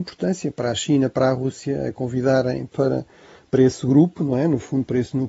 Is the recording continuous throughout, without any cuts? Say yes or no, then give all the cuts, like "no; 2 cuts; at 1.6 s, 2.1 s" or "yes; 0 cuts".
yes; 0 cuts